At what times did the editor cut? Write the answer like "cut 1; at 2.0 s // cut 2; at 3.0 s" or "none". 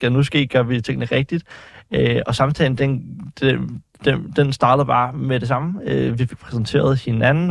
none